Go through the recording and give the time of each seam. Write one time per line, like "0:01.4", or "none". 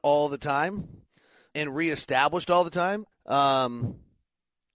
0:01.5
0:03.1